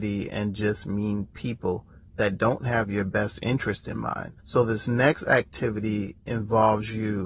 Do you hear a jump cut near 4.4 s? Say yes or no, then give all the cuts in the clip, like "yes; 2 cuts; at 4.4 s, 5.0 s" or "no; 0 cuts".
yes; 1 cut; at 4.4 s